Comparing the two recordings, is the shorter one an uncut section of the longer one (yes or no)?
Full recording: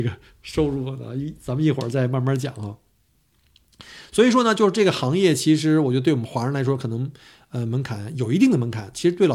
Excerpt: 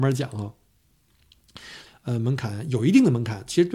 no